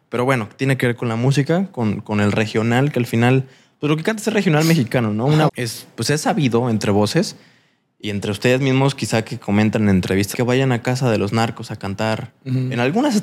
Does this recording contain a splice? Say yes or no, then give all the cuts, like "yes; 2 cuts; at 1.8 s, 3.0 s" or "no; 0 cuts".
yes; 2 cuts; at 5.5 s, 10.3 s